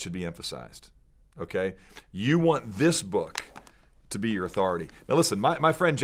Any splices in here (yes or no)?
yes